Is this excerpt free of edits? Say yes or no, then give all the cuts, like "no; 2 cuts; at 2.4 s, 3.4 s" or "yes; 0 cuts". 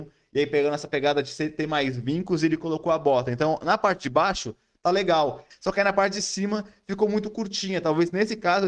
no; 1 cut; at 5.5 s